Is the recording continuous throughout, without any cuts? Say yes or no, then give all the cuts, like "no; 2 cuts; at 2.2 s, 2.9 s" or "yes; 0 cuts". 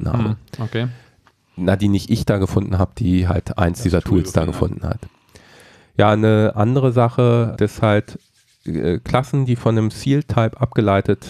no; 1 cut; at 7.6 s